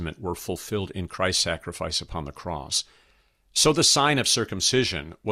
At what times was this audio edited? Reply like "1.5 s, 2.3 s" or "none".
none